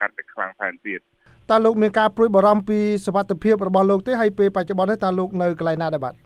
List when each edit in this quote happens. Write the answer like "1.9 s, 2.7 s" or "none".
none